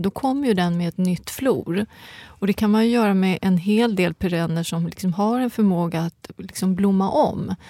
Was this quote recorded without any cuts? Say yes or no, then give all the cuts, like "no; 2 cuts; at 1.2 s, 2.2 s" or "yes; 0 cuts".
yes; 0 cuts